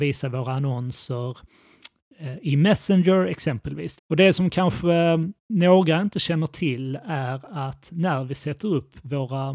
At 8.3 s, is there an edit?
no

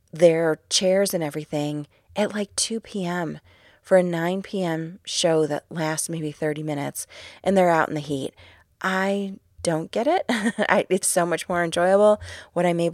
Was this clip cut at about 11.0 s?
yes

